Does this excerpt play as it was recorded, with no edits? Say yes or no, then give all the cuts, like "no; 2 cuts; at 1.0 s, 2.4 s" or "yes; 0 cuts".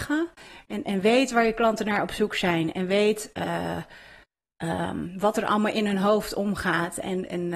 yes; 0 cuts